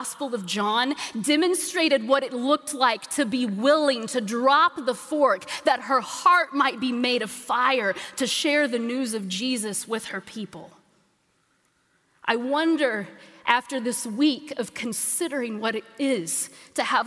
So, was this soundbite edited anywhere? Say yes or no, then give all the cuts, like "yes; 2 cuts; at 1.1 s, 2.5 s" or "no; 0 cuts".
no; 0 cuts